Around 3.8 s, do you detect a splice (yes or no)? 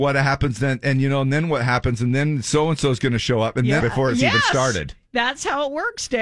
yes